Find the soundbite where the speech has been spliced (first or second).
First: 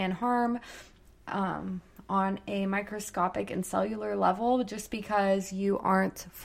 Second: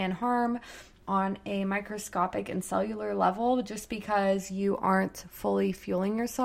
second